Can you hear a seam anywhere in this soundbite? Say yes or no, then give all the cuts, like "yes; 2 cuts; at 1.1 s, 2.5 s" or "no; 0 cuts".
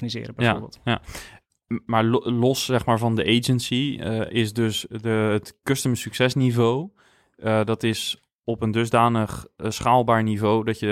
no; 0 cuts